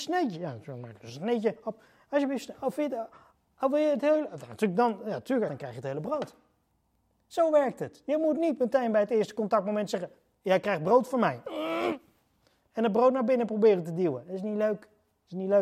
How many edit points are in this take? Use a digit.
1